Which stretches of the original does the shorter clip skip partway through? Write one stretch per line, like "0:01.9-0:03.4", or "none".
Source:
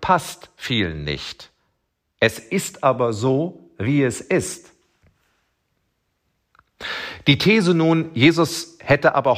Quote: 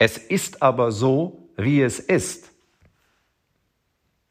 none